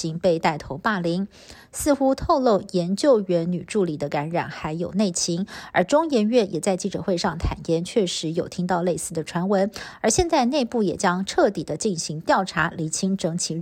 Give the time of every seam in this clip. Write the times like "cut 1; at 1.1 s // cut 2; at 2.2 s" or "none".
none

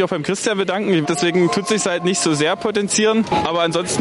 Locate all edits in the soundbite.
cut 1; at 1.0 s

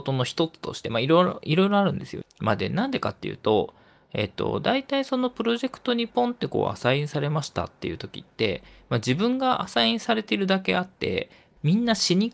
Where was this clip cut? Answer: cut 1; at 2.2 s

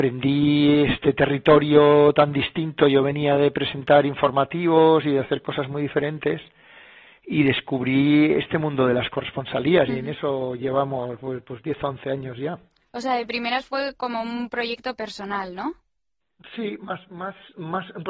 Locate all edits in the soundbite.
none

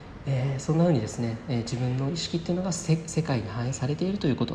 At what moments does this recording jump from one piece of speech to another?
none

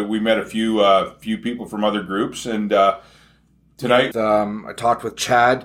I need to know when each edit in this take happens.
cut 1; at 4.1 s

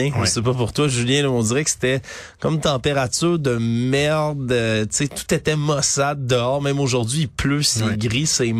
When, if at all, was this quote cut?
none

